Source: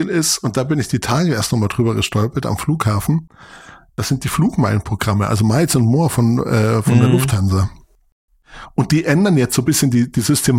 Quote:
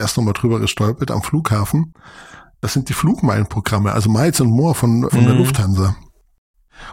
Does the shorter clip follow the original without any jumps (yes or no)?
no